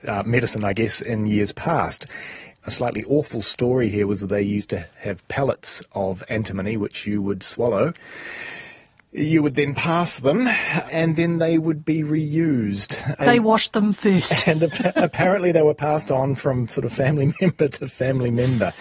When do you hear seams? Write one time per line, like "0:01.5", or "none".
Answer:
0:02.6
0:13.2

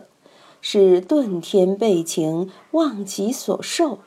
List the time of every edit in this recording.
none

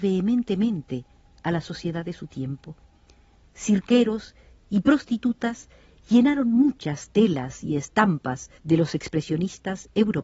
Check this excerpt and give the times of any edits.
0:03.4
0:08.6

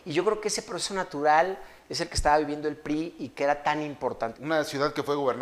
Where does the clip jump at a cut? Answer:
0:04.3

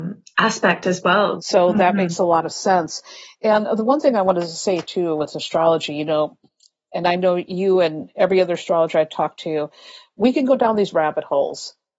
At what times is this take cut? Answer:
0:01.4

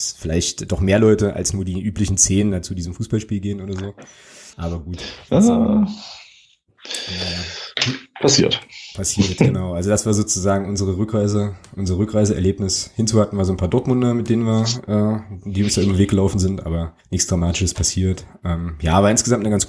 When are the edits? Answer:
0:04.5
0:17.0

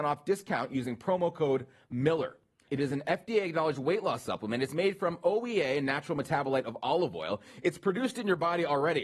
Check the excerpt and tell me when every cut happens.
0:02.7

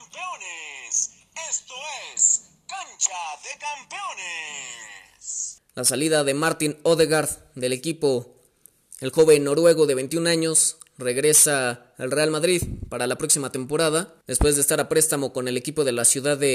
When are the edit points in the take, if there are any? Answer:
0:05.6
0:14.2

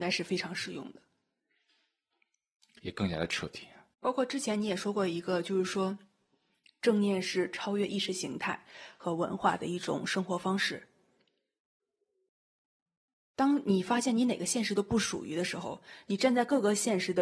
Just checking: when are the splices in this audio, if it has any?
0:03.9

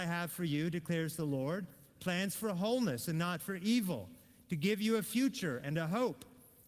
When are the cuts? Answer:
none

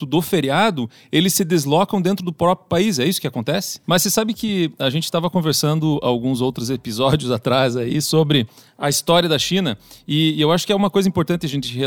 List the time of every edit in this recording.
0:03.8

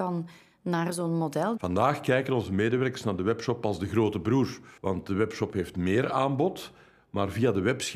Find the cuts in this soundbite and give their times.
0:01.6
0:04.8

